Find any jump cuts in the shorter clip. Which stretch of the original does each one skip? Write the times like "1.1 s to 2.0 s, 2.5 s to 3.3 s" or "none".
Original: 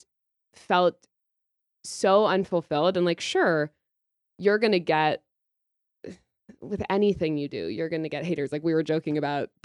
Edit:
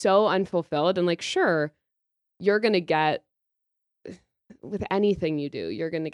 none